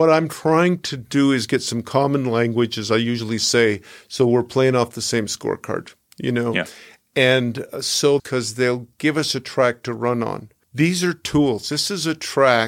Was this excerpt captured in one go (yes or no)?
no